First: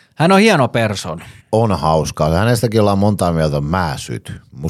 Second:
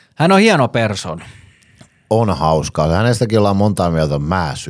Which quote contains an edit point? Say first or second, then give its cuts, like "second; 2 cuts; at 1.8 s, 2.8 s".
first; 1 cut; at 1.4 s